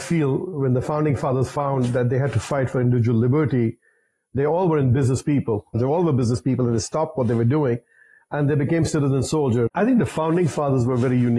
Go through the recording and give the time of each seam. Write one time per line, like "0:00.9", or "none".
0:05.7
0:09.7